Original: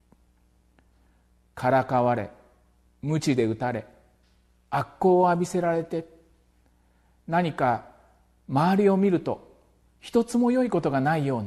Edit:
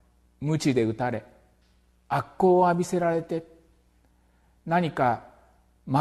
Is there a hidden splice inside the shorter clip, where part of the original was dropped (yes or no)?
no